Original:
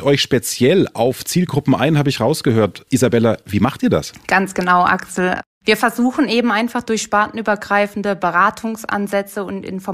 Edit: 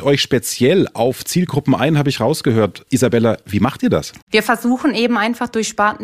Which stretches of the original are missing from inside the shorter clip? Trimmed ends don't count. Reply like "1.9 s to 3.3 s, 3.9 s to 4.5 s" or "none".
4.2 s to 5.6 s